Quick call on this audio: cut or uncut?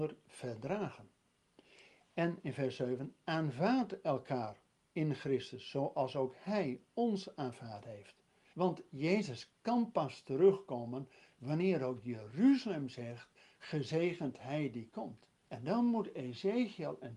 cut